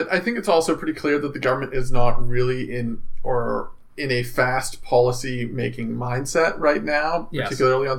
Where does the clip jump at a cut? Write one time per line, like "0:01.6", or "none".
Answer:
none